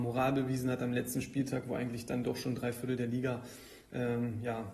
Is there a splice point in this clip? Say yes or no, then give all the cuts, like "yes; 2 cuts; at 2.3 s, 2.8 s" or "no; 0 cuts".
no; 0 cuts